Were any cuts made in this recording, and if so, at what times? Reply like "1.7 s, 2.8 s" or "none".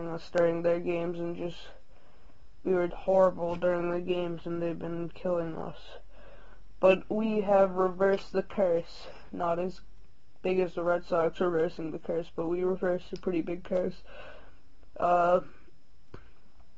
2.9 s